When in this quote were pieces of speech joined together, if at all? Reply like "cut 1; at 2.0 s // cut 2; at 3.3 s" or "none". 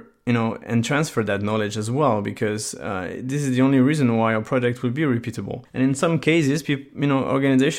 none

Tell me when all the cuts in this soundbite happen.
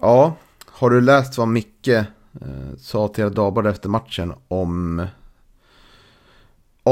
none

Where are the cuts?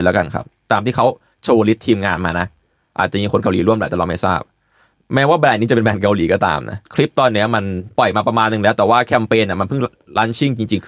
cut 1; at 6.9 s

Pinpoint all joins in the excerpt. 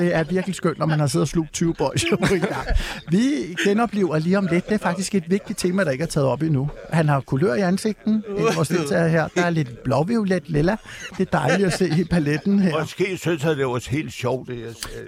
cut 1; at 11.1 s

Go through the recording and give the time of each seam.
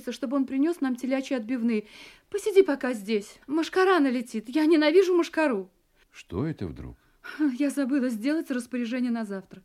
cut 1; at 3.4 s // cut 2; at 6.0 s

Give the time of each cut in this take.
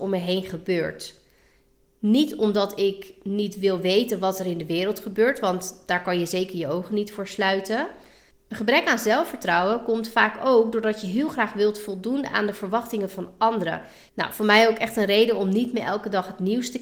cut 1; at 8.3 s // cut 2; at 14.1 s

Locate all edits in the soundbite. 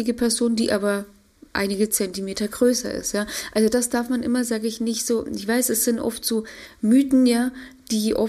none

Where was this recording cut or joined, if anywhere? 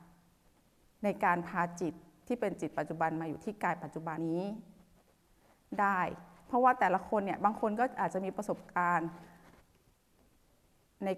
cut 1; at 4.2 s

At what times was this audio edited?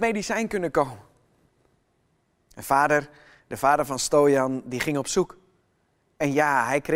none

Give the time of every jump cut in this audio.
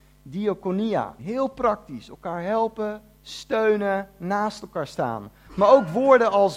cut 1; at 1.2 s // cut 2; at 5.5 s

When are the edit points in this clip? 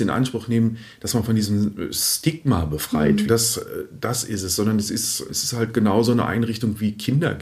cut 1; at 3.3 s // cut 2; at 5.3 s

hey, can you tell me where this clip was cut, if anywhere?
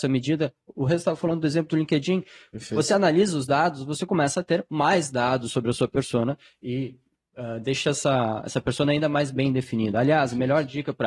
none

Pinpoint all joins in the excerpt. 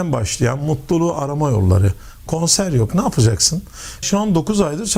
cut 1; at 2.3 s // cut 2; at 4.0 s

